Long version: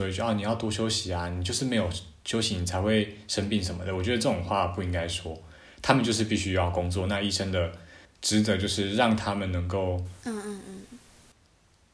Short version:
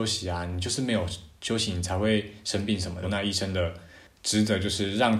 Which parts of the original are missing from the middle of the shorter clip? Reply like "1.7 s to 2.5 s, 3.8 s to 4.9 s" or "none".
3.9 s to 7.0 s